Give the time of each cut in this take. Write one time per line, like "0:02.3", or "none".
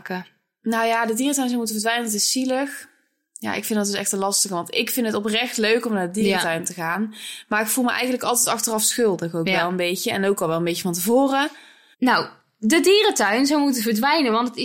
0:11.9